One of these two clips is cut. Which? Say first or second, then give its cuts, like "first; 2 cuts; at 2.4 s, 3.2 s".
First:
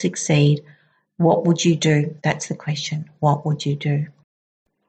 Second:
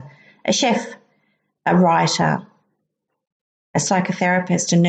first; 1 cut; at 2.2 s